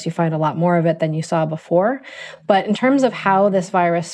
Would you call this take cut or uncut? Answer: uncut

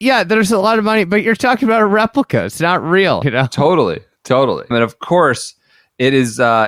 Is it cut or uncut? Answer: cut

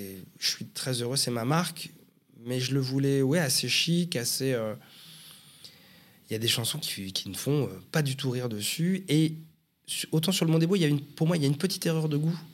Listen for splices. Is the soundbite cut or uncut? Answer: uncut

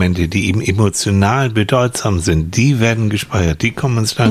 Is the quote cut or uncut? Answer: uncut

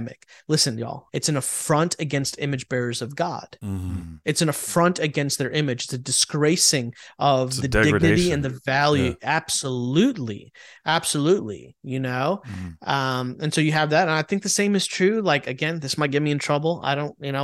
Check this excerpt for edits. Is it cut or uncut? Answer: cut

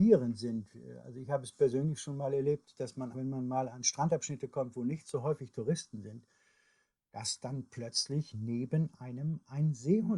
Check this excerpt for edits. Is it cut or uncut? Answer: cut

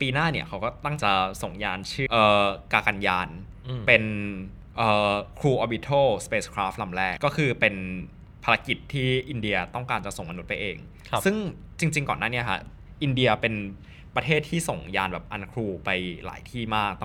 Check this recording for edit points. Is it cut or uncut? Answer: cut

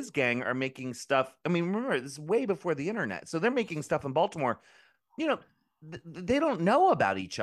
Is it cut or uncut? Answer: uncut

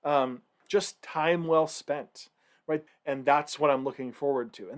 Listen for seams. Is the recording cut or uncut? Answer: cut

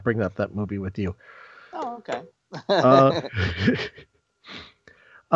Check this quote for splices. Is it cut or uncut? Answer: uncut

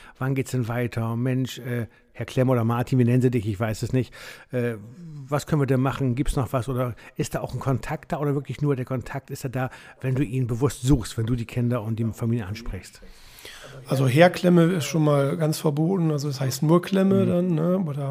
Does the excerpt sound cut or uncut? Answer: uncut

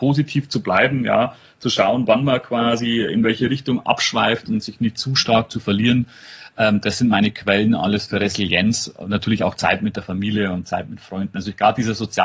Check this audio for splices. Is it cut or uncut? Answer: uncut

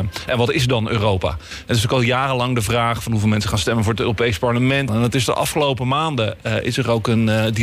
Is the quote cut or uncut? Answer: cut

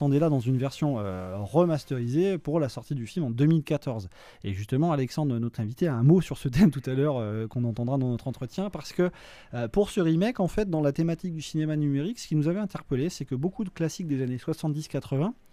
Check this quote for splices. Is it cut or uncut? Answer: uncut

